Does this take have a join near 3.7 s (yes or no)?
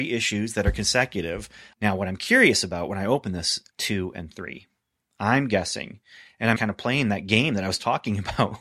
yes